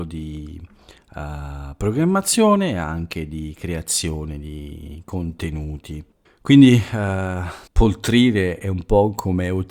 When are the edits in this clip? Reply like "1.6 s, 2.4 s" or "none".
6.3 s, 7.7 s